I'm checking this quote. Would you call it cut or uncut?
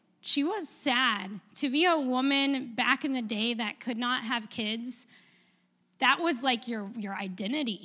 uncut